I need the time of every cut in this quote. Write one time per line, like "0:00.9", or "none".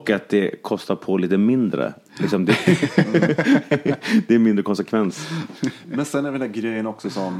none